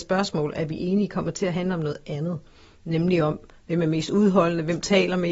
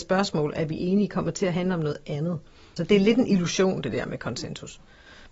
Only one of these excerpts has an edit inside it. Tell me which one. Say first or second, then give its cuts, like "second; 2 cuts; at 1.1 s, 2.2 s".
second; 1 cut; at 2.8 s